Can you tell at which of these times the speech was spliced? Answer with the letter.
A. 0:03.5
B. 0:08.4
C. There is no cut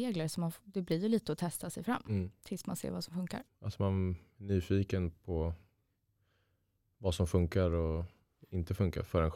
A